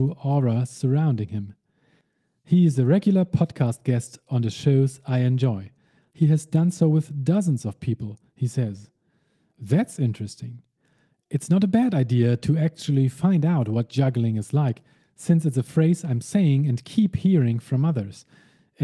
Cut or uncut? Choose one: cut